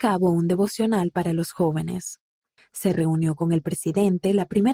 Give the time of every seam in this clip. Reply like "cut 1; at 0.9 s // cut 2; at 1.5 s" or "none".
cut 1; at 2.6 s